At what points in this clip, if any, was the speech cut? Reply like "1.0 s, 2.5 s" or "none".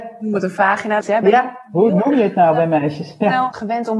1.0 s